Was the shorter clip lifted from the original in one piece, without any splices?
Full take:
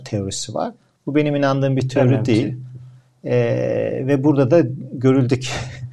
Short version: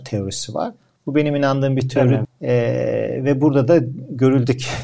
no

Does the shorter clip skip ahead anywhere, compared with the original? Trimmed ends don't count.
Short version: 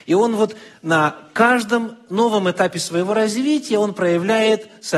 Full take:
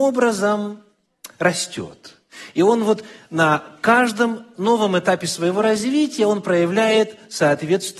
no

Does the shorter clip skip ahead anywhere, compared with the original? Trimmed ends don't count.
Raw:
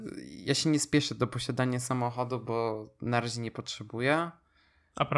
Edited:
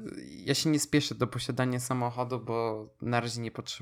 no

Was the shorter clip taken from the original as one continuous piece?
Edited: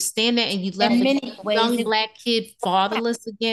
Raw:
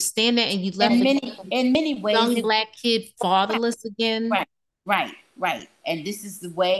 no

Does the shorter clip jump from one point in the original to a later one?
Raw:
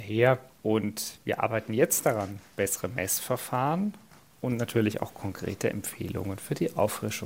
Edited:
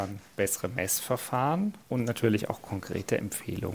yes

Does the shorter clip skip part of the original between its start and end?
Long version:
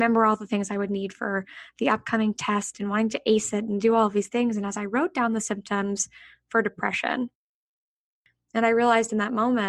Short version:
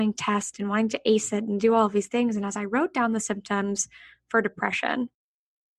no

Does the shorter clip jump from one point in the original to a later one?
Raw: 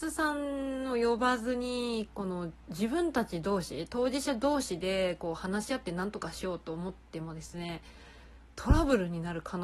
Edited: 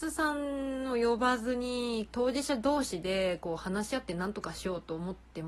yes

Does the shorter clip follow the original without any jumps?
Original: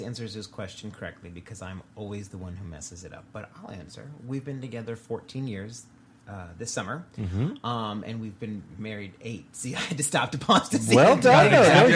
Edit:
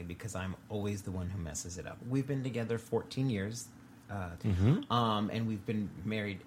no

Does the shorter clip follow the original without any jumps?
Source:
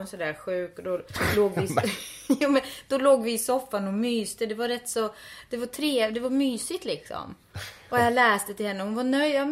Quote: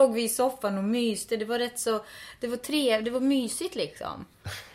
yes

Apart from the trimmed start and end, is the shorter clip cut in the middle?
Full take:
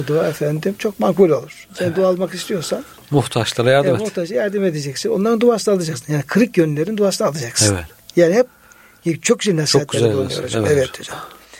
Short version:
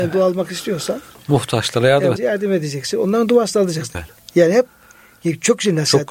yes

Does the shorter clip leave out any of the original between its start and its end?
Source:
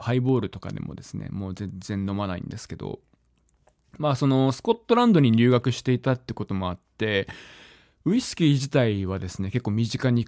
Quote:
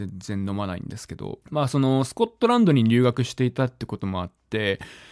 yes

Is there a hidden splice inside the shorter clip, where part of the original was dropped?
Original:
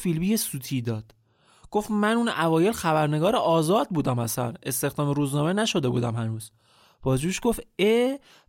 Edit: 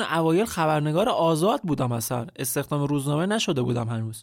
no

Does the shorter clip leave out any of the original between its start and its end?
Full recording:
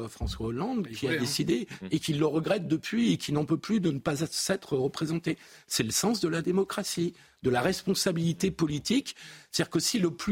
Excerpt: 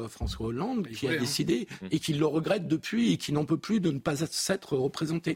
no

